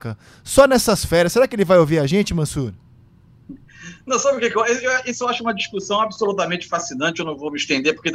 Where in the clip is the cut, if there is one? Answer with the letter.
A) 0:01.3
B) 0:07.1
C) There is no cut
C